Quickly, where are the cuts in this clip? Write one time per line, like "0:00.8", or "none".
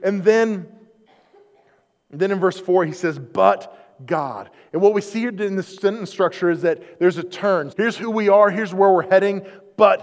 0:07.7